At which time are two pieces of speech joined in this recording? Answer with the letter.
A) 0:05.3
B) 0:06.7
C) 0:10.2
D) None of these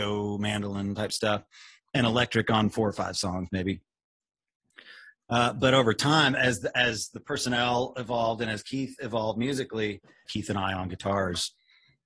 C